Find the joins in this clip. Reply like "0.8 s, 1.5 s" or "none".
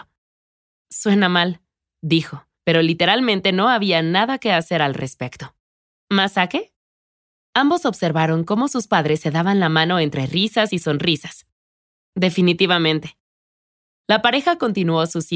2.6 s